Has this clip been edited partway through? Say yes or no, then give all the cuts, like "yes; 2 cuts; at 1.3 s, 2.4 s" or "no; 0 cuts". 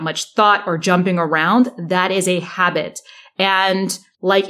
no; 0 cuts